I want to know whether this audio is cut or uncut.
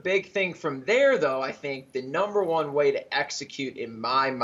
uncut